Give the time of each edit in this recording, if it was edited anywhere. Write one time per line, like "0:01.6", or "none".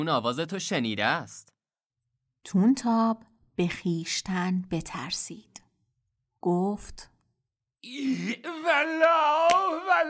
none